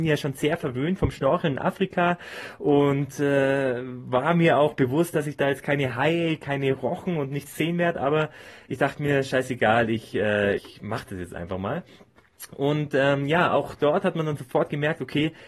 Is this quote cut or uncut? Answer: cut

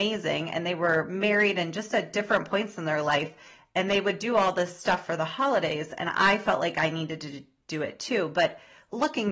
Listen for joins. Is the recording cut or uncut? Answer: uncut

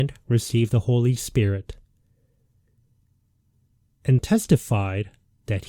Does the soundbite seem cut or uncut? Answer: cut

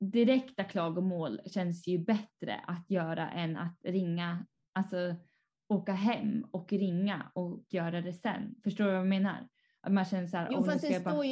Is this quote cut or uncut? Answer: uncut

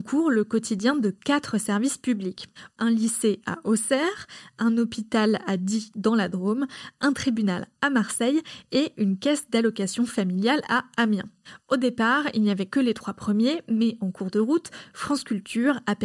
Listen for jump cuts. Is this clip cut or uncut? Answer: uncut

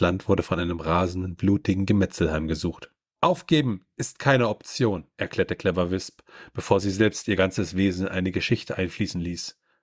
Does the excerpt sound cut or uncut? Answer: cut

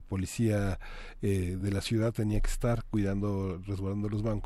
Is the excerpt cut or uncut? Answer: uncut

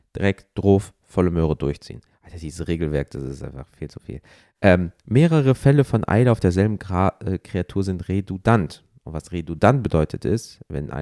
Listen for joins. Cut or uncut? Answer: cut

